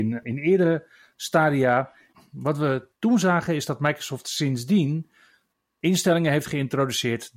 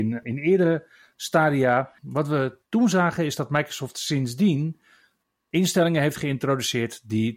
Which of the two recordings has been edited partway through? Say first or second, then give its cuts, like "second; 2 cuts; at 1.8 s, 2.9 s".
second; 1 cut; at 2.0 s